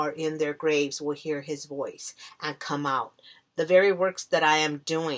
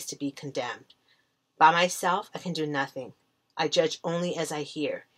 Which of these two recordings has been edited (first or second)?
first